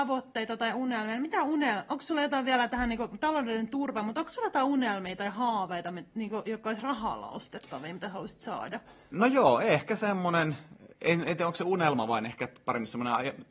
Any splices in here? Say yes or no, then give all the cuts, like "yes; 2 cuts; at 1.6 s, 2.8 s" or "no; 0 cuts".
yes; 1 cut; at 9.1 s